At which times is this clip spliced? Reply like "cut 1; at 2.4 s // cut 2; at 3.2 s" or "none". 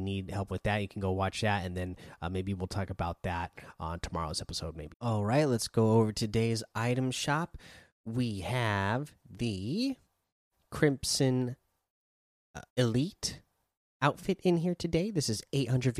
cut 1; at 4.9 s // cut 2; at 12.7 s